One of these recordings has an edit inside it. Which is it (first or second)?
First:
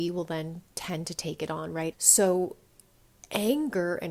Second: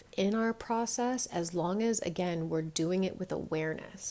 first